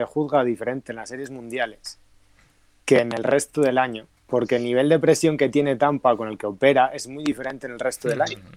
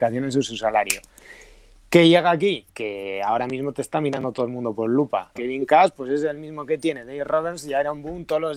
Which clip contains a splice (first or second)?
second